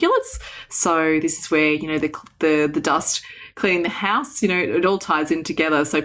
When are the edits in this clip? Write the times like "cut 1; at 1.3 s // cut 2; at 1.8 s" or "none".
none